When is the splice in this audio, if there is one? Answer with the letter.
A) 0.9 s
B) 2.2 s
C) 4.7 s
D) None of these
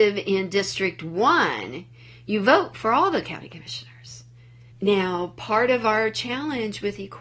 C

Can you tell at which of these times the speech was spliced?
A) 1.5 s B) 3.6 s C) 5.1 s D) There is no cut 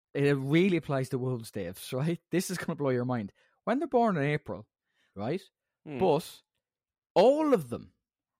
C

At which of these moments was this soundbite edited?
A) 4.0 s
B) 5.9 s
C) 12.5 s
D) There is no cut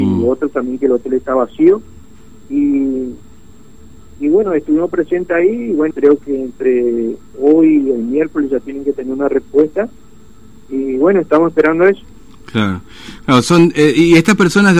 B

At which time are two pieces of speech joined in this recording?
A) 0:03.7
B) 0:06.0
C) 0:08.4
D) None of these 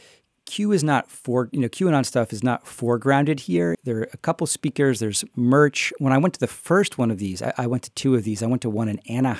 A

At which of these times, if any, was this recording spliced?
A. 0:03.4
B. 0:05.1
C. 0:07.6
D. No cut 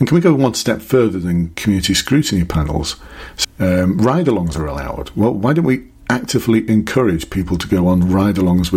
A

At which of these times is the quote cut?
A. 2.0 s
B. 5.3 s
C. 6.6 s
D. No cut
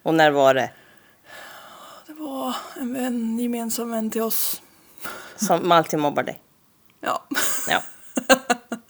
D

